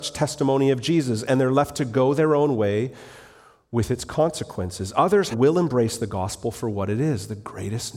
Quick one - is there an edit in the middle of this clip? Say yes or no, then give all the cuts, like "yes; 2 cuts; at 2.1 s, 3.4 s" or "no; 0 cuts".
yes; 1 cut; at 5.3 s